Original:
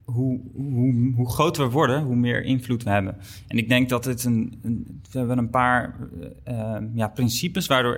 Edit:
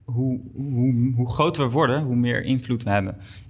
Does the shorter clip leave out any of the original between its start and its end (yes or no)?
no